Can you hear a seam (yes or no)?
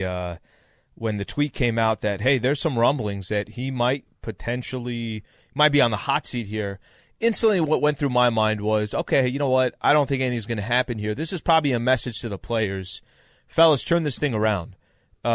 no